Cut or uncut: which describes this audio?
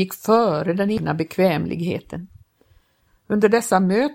cut